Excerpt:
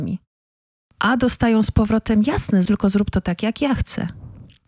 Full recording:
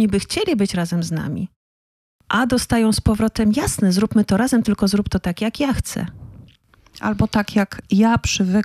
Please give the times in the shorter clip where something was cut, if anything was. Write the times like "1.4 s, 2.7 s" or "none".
2.7 s